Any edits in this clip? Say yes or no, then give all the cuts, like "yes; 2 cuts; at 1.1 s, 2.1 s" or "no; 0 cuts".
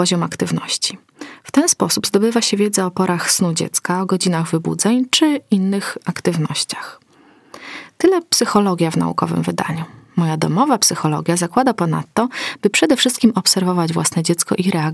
no; 0 cuts